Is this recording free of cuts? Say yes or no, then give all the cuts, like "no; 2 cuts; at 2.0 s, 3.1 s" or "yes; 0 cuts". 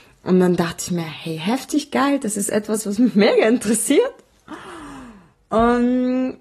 yes; 0 cuts